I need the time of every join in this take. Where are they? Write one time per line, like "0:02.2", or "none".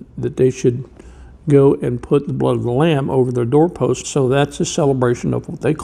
0:04.0